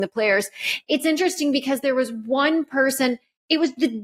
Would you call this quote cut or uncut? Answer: uncut